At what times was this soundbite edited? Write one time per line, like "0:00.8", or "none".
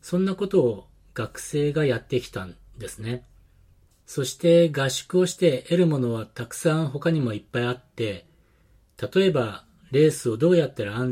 0:03.9

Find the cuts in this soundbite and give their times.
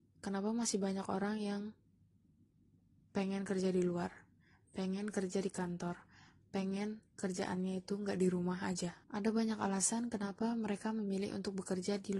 0:07.1
0:09.0

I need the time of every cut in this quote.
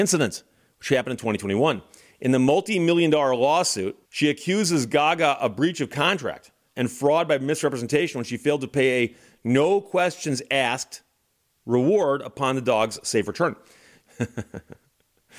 0:04.0
0:06.7
0:14.0

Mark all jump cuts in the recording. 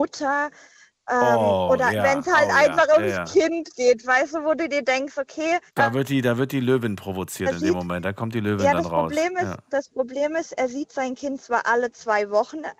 0:05.7

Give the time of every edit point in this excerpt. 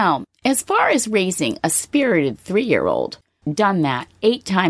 0:03.4

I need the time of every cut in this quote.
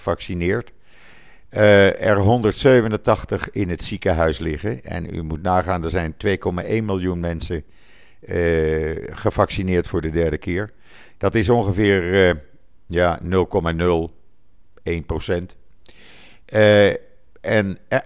none

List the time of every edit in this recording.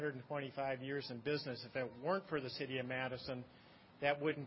none

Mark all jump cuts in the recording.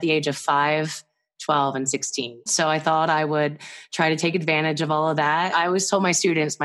0:02.5
0:05.5

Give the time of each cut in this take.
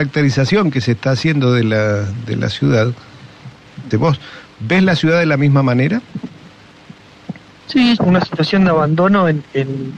0:03.9
0:08.0

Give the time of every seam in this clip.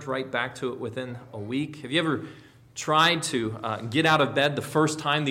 none

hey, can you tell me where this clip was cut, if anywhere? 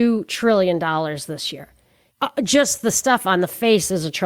0:02.1

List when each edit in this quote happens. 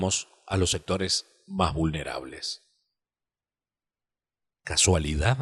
none

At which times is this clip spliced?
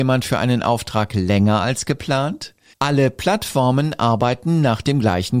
0:02.7

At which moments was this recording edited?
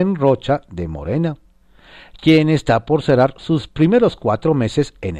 0:03.7

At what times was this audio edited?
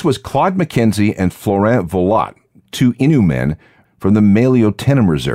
none

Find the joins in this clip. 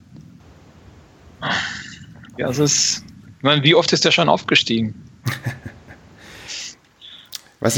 0:02.4

